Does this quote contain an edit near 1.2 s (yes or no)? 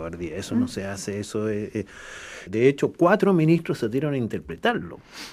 no